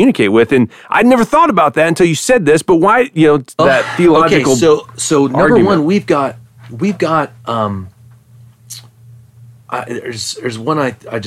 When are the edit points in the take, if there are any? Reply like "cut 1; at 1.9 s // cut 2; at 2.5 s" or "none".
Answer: cut 1; at 3.6 s